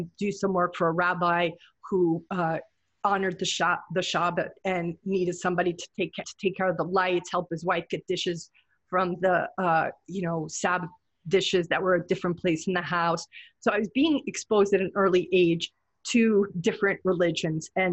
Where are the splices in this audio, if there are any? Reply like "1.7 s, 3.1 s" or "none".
6.2 s